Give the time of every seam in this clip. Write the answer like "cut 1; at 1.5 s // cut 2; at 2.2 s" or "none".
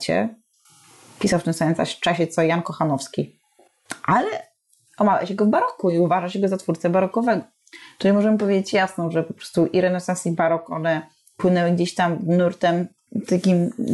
none